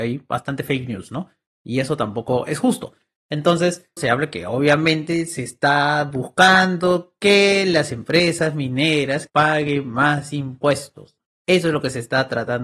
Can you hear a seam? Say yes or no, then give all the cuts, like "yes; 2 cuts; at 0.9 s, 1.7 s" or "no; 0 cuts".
yes; 2 cuts; at 4.0 s, 9.3 s